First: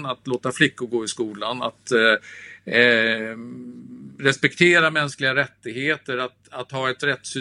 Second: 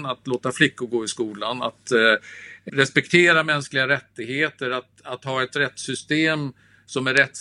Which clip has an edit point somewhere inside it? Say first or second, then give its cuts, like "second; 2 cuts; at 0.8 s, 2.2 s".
second; 1 cut; at 2.7 s